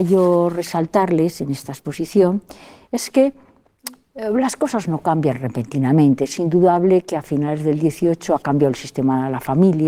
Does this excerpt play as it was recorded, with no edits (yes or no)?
yes